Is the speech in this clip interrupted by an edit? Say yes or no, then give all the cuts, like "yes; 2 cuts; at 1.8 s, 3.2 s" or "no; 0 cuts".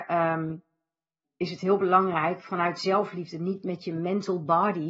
yes; 1 cut; at 1.2 s